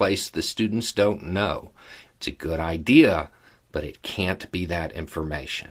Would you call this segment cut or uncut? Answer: cut